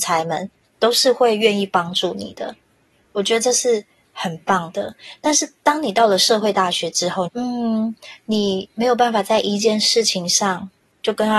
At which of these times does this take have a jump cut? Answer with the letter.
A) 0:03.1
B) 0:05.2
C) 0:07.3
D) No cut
C